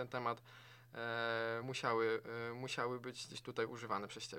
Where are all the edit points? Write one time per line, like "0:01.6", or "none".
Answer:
none